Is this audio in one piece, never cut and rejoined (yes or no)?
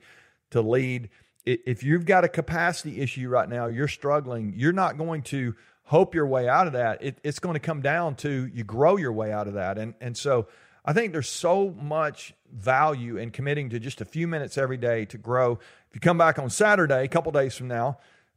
yes